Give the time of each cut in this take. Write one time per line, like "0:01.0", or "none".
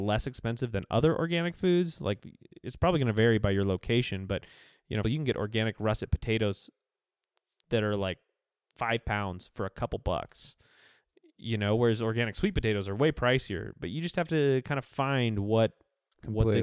0:05.0